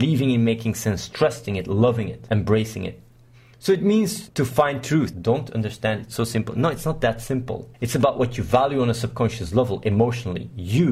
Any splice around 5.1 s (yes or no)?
yes